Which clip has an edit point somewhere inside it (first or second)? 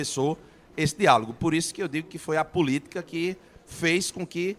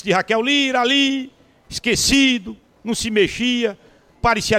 second